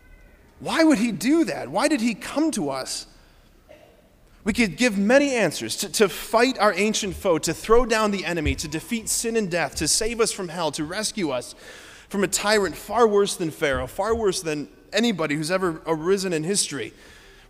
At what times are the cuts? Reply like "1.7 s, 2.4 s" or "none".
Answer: none